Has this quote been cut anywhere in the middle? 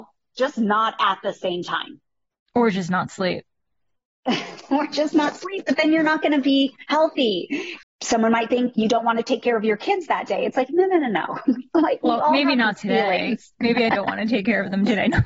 yes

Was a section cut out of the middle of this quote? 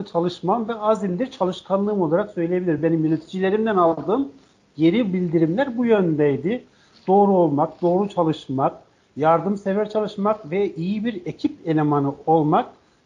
no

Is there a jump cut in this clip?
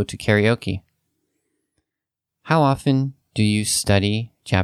no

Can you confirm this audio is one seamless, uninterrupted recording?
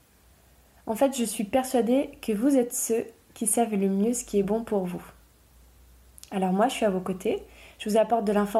yes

